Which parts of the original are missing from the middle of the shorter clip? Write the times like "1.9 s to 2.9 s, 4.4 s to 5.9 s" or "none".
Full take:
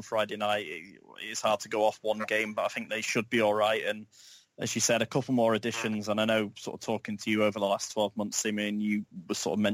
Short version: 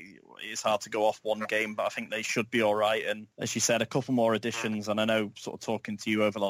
4.1 s to 4.5 s